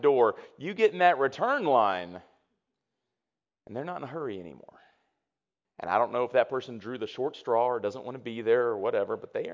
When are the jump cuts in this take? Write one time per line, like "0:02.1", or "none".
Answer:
0:05.6